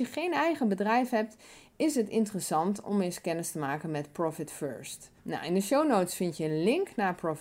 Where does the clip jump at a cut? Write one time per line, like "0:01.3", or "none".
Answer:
0:05.2